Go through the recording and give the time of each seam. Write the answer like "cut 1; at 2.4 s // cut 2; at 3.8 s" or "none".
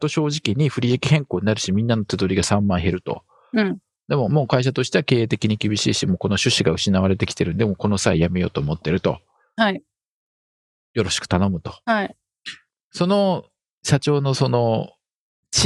cut 1; at 11.8 s